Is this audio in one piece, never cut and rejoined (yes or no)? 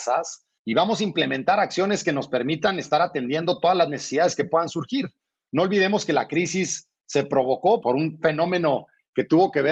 yes